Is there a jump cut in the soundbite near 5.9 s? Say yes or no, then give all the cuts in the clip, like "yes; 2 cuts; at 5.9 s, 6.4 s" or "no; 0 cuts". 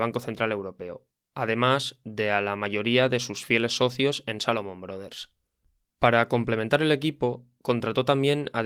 yes; 1 cut; at 5.9 s